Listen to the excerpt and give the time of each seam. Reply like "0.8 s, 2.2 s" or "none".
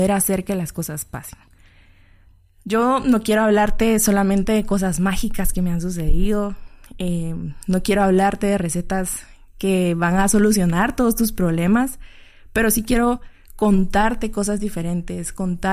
none